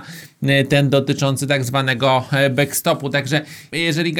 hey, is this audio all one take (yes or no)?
yes